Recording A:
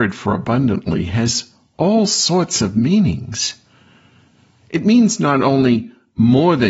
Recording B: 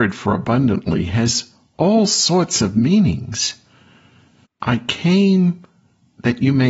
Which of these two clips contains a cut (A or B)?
B